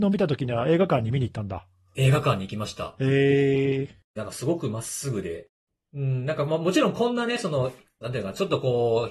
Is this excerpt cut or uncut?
cut